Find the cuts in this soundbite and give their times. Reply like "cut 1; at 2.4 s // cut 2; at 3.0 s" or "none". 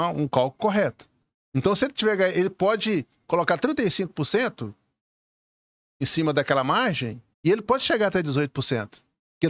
cut 1; at 7.3 s